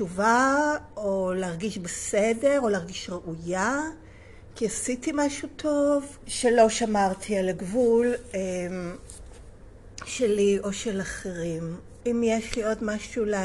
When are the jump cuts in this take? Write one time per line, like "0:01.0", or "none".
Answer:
0:06.2
0:12.0